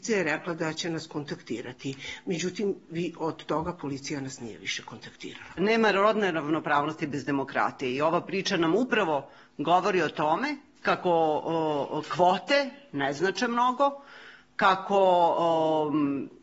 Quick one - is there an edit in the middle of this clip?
no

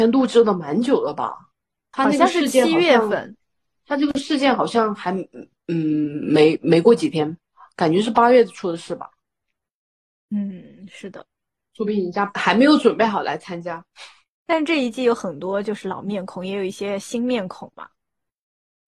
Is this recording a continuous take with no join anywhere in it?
yes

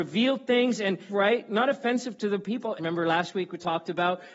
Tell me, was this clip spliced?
yes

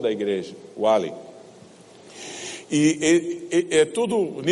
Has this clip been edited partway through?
no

